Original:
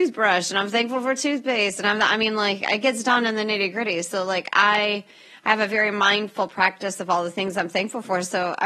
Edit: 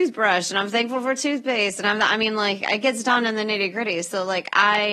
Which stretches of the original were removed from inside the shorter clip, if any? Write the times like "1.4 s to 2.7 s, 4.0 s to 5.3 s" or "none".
none